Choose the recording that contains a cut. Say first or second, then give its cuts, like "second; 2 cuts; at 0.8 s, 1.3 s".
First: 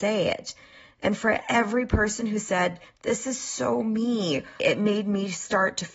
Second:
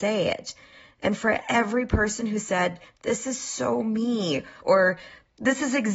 first; 1 cut; at 4.6 s